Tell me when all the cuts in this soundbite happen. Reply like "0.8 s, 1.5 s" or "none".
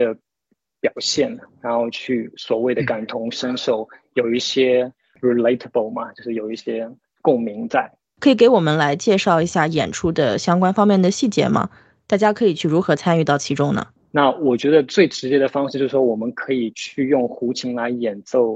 14.0 s

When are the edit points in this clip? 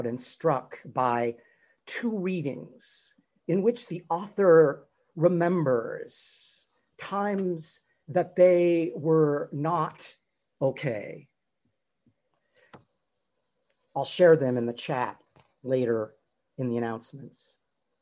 none

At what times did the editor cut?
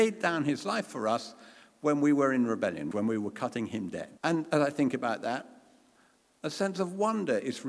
2.9 s, 4.2 s

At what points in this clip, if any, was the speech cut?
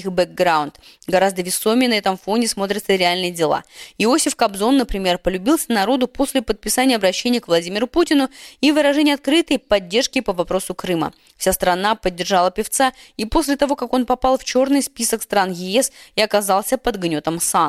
none

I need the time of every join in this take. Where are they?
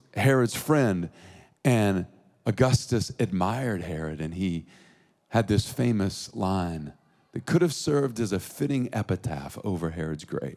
none

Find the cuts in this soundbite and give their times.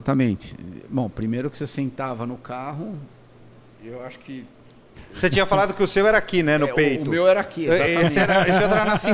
none

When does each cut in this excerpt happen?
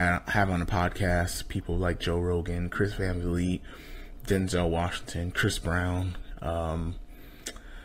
none

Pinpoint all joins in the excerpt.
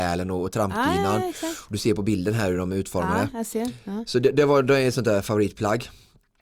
none

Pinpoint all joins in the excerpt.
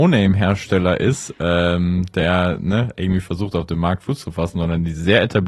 none

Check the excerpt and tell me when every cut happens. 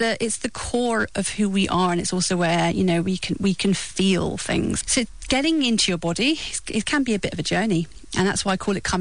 4.8 s

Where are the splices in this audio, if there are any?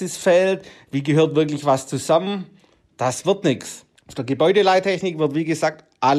4.0 s

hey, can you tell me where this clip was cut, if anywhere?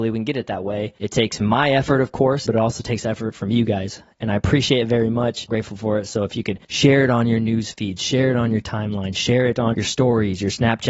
2.5 s, 5.5 s, 9.7 s

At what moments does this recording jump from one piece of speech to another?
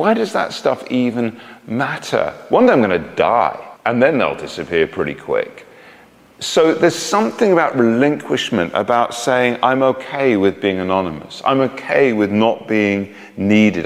3.8 s

